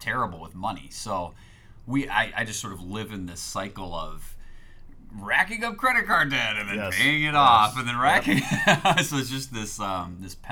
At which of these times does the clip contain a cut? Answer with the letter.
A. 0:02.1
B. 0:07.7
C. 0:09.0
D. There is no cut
D